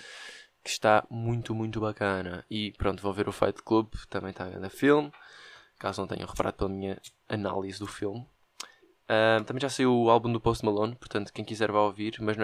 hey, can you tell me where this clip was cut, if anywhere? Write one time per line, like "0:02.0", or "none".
none